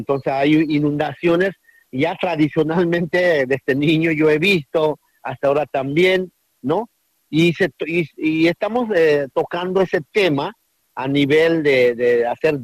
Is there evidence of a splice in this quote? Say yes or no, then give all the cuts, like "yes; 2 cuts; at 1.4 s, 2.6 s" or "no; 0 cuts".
no; 0 cuts